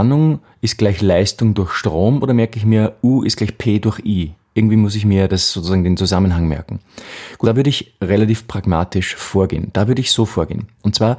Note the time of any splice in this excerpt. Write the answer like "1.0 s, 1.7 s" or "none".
7.4 s

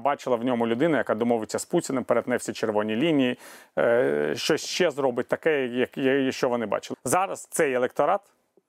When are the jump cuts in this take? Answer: 6.9 s

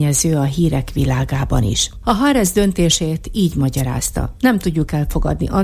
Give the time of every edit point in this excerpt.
2.0 s

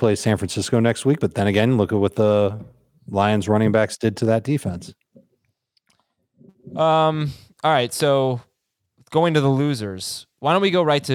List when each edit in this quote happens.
none

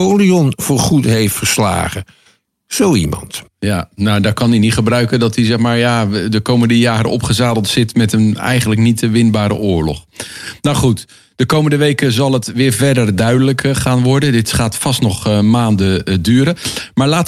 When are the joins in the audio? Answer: none

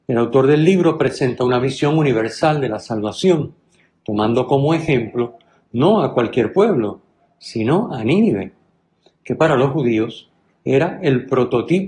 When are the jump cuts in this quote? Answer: none

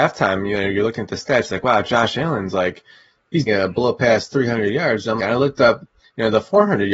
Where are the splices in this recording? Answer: 3.5 s, 5.2 s

